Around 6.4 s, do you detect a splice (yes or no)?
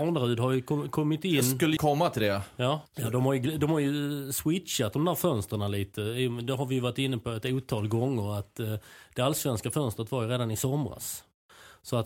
no